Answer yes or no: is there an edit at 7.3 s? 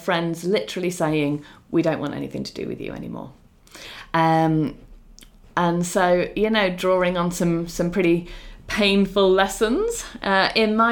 no